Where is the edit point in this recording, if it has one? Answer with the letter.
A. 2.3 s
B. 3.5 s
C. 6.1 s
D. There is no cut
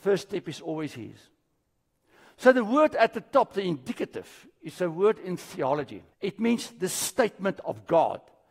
C